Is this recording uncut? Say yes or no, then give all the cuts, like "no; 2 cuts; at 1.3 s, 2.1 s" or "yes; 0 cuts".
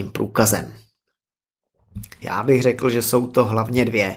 no; 1 cut; at 2.2 s